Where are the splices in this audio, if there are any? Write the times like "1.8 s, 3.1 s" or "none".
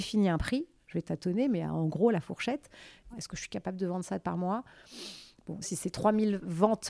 3.1 s, 5.6 s